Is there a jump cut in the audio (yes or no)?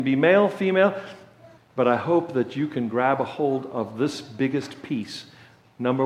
yes